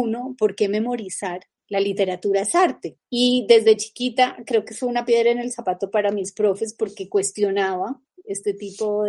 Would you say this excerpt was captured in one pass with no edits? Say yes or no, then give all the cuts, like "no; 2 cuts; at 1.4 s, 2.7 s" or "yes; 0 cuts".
yes; 0 cuts